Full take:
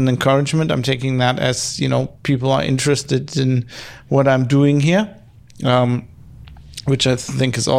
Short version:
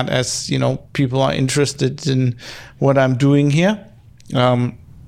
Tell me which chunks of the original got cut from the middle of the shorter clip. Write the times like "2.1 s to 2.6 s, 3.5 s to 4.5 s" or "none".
none